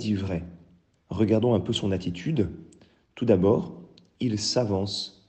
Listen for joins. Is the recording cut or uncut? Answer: cut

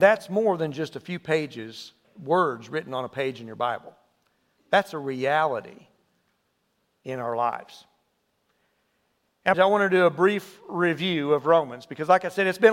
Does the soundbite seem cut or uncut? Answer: cut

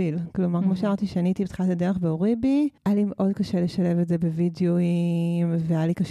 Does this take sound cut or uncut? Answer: cut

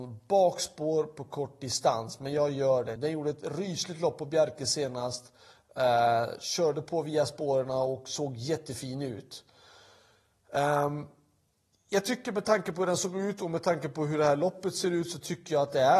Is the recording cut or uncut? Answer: cut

